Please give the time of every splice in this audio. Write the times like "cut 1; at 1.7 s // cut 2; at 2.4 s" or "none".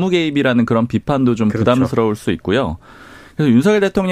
none